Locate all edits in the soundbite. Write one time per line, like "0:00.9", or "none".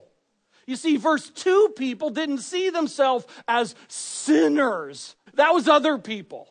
0:05.3